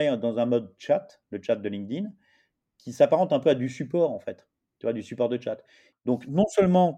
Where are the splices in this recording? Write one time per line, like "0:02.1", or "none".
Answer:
0:05.9